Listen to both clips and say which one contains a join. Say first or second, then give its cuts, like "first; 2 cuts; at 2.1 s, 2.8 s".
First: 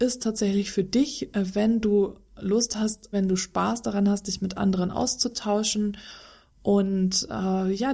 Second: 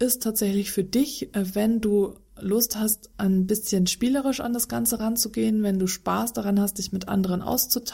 first; 1 cut; at 3.1 s